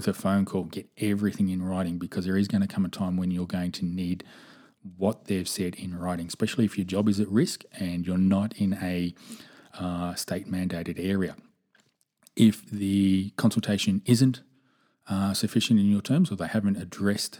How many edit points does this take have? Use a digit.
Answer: 0